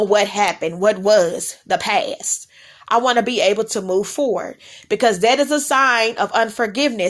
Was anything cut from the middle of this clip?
no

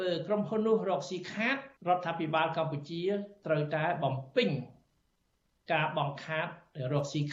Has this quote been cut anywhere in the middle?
yes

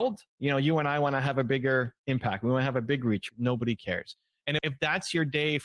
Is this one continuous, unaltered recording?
no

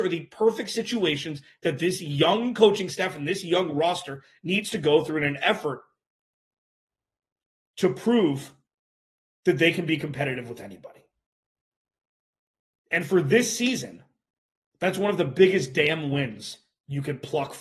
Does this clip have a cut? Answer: no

